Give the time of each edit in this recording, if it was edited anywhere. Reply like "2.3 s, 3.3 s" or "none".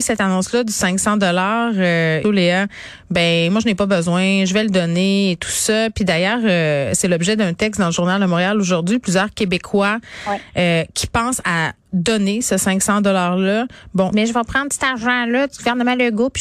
2.2 s, 14.1 s